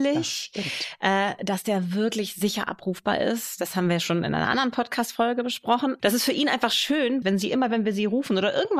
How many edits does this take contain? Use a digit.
2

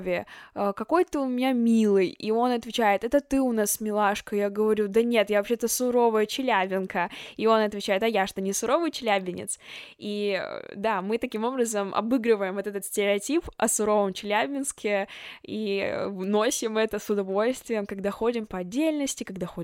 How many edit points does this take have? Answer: 0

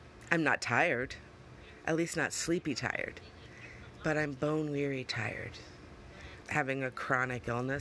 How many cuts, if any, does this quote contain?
1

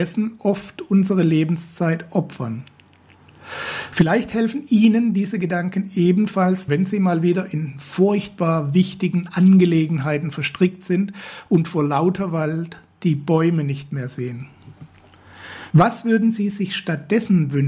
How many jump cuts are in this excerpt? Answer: 2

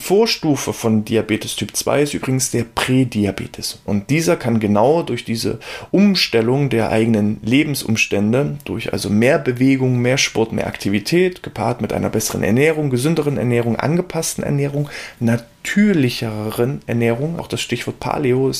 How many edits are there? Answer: 1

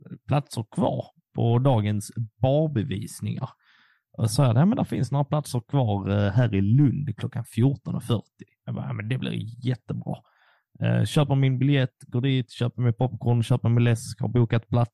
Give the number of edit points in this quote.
0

